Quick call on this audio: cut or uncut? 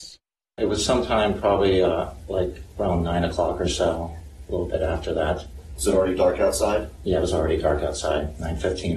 uncut